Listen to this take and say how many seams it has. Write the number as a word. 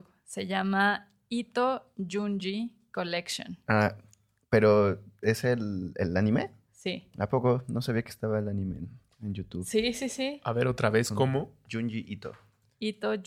one